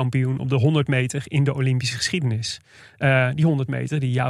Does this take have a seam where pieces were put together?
no; 0 cuts

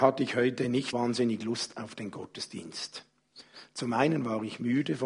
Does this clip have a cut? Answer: yes; 1 cut; at 0.9 s

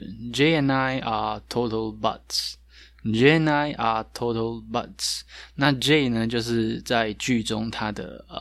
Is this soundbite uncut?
yes; 0 cuts

